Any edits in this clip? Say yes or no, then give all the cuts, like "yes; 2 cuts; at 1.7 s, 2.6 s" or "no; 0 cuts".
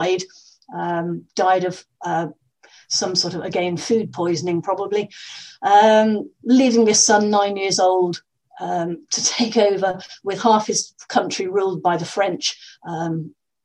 no; 0 cuts